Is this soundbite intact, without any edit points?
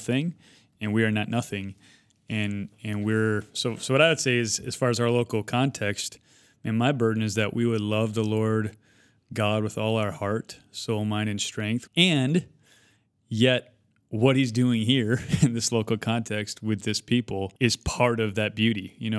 no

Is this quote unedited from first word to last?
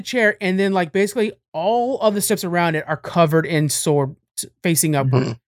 yes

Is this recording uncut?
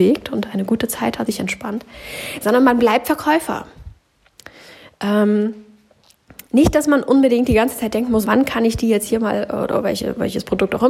no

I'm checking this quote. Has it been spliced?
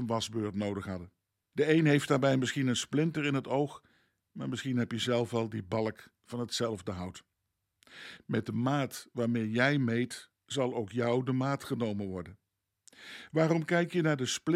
yes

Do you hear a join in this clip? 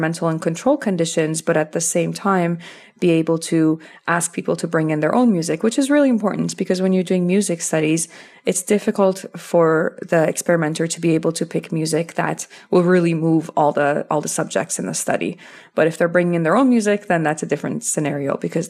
no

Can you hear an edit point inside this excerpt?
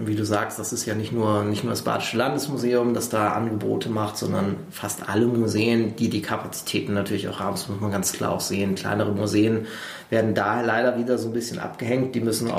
no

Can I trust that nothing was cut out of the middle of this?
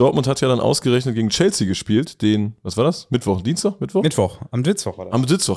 yes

